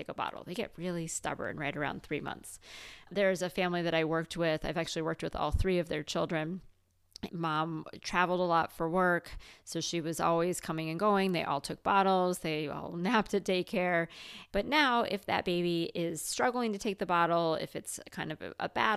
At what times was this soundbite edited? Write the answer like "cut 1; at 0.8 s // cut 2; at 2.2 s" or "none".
cut 1; at 7.3 s // cut 2; at 14.5 s